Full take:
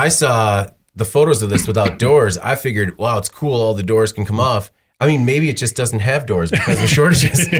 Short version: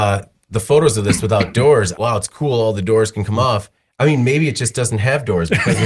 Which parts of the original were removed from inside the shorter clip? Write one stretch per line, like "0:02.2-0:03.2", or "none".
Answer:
0:02.4-0:03.0